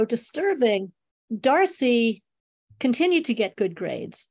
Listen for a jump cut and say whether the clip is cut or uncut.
uncut